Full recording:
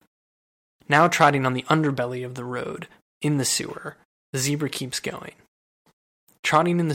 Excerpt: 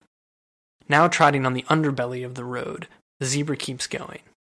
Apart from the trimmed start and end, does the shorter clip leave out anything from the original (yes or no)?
yes